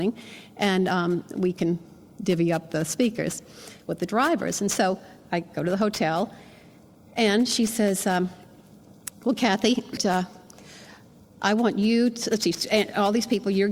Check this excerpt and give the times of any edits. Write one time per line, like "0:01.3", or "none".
0:10.0